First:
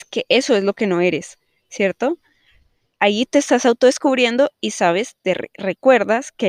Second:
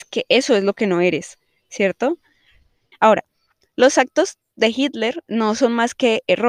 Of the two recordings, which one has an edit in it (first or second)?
second